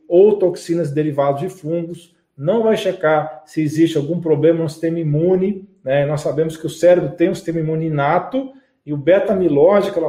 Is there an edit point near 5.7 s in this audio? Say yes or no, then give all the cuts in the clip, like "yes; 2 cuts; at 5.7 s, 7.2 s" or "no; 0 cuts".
no; 0 cuts